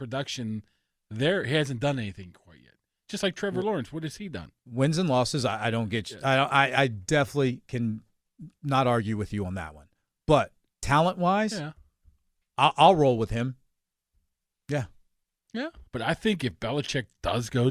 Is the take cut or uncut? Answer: cut